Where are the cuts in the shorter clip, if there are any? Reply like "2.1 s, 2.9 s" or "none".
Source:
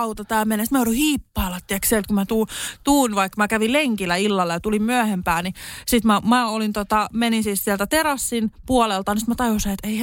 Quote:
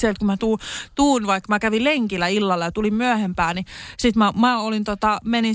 none